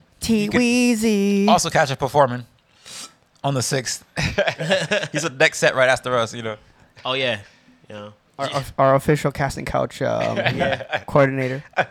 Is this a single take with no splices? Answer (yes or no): no